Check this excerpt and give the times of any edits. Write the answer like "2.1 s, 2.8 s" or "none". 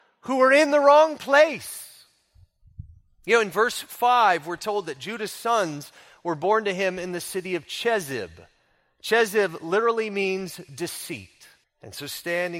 11.6 s